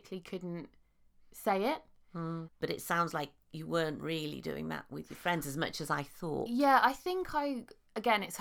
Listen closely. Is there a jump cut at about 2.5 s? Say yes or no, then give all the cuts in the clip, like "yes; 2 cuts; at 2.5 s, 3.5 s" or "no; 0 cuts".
yes; 1 cut; at 2.5 s